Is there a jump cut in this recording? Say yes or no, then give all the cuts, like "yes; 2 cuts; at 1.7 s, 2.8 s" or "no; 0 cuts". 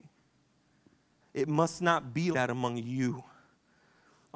yes; 2 cuts; at 1.2 s, 2.3 s